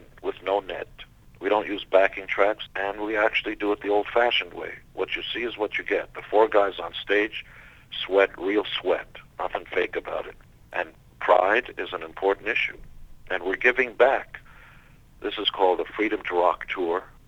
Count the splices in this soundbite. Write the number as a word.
one